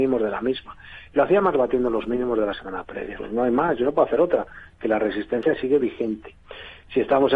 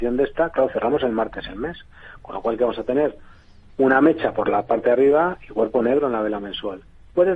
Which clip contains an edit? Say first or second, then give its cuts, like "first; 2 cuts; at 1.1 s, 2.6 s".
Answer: first; 1 cut; at 3.2 s